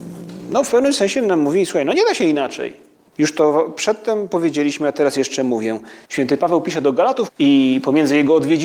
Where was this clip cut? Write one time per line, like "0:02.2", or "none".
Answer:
0:03.1
0:06.0
0:07.3